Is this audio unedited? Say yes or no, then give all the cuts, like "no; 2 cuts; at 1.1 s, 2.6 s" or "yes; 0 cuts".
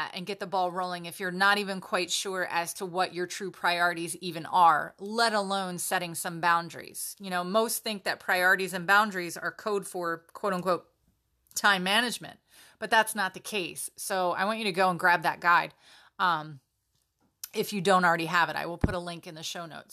yes; 0 cuts